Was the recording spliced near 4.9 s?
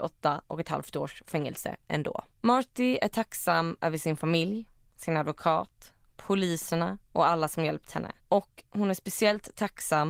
no; 2 cuts; at 2.3 s, 8.2 s

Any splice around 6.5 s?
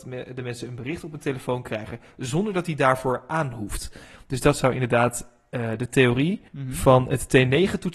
yes; 1 cut; at 6.5 s

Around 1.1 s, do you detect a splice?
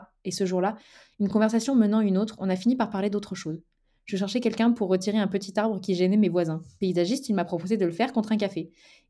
no; 0 cuts

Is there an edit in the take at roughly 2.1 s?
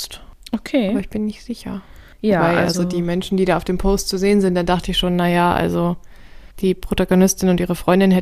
no; 1 cut; at 6.5 s

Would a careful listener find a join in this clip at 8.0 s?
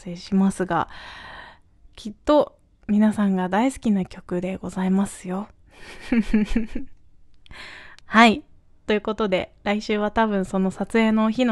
yes; 1 cut; at 8.0 s

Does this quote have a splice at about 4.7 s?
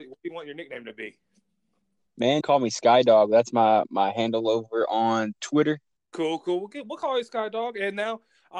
no; 2 cuts; at 2.4 s, 6.0 s

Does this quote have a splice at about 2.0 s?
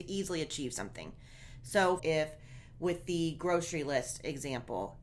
yes; 1 cut; at 2.0 s

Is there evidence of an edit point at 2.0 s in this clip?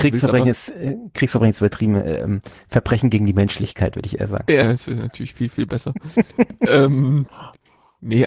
no; 1 cut; at 4.6 s

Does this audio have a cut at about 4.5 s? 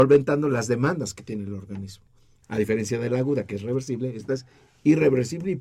no; 1 cut; at 2.4 s

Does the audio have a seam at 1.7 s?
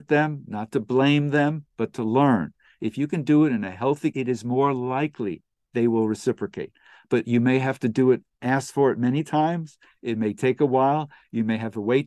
yes; 2 cuts; at 1.7 s, 4.1 s

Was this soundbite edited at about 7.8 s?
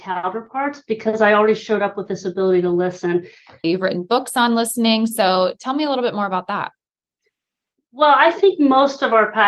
no; 1 cut; at 3.6 s

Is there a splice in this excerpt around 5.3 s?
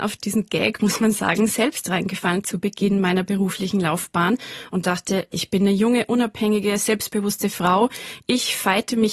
yes; 1 cut; at 5.3 s

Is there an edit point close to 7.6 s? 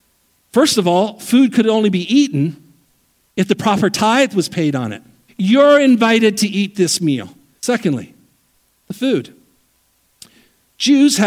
yes; 2 cuts; at 5.3 s, 7.6 s

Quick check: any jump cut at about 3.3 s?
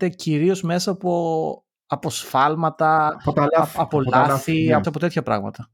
no; 1 cut; at 4.8 s

